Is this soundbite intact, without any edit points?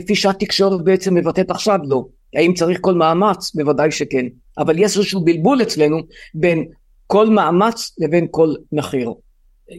yes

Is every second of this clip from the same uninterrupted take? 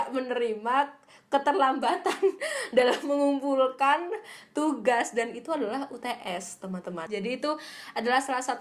no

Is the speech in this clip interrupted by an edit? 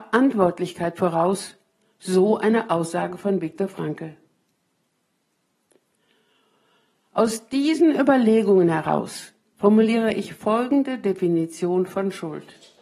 no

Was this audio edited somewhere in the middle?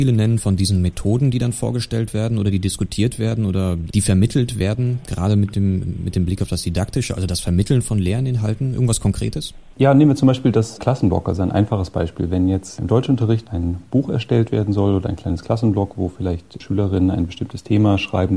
no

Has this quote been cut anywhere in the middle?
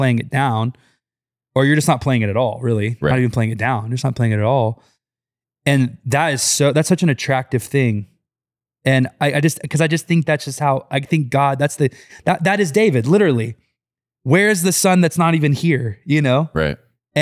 no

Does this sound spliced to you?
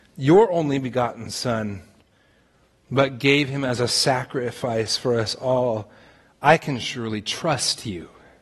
no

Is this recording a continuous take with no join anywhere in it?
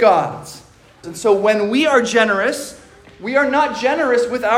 no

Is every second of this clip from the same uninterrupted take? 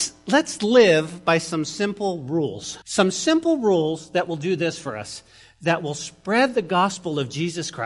no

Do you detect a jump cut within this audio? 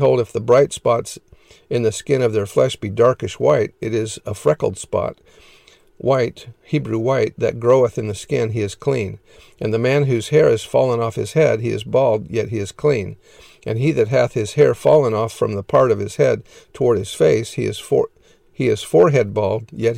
no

